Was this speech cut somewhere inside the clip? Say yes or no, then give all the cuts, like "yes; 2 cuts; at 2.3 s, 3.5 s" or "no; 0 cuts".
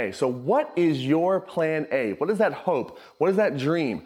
no; 0 cuts